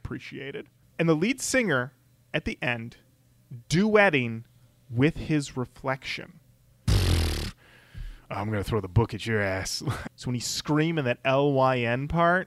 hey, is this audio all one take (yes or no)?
no